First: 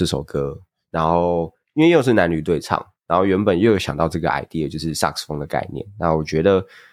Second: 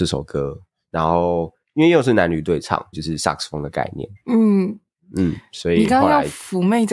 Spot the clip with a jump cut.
second; 2 cuts; at 2.9 s, 4.2 s

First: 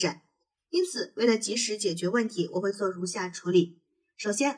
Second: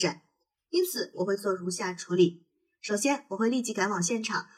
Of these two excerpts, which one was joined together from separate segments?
second; 1 cut; at 1.1 s

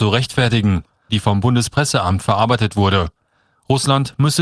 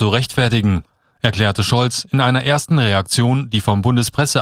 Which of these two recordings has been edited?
first; 1 cut; at 1.1 s

